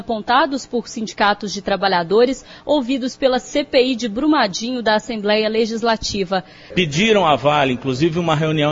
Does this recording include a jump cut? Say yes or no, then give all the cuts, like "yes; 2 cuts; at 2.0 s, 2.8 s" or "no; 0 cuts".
yes; 1 cut; at 6.7 s